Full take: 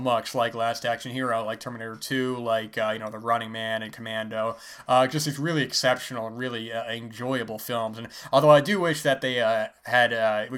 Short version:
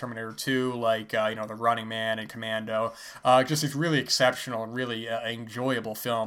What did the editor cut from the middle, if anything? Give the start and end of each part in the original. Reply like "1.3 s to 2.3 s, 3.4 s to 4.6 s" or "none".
none